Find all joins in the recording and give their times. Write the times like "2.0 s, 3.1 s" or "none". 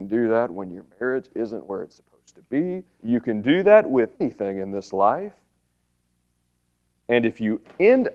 3.0 s, 4.1 s